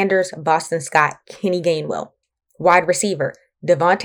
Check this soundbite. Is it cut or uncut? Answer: uncut